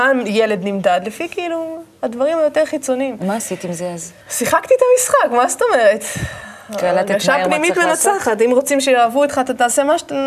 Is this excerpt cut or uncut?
cut